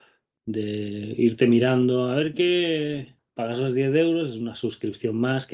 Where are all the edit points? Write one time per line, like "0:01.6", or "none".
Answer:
0:03.2